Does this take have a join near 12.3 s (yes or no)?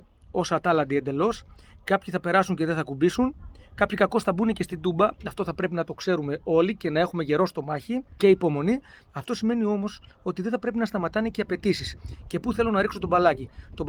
no